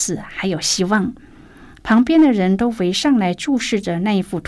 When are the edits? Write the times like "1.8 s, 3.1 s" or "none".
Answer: none